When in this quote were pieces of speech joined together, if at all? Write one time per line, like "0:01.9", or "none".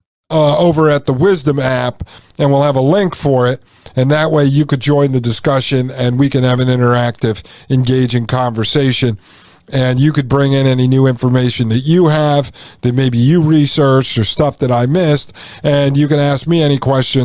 none